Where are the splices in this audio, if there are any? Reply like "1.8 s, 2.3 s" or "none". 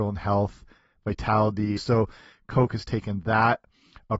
1.8 s